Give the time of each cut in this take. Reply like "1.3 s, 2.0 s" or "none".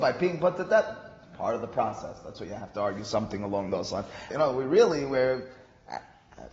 4.3 s